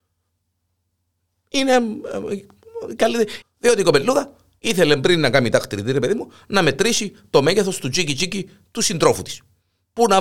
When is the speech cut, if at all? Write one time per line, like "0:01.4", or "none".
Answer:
0:03.4